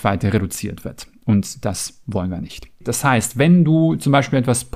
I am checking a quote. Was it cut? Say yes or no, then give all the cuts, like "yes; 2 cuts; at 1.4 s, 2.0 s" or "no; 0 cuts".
yes; 1 cut; at 2.8 s